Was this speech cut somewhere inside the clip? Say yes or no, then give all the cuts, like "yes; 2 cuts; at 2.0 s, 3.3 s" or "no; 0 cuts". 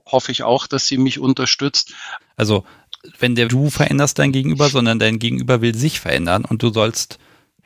yes; 2 cuts; at 2.2 s, 3.5 s